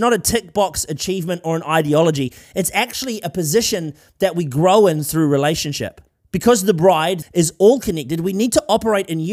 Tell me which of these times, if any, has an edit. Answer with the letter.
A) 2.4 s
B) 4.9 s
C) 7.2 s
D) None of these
C